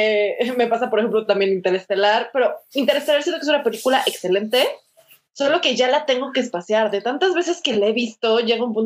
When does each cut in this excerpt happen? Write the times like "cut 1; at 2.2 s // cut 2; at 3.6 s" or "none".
none